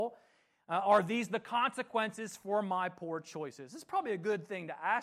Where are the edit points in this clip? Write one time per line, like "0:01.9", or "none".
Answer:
none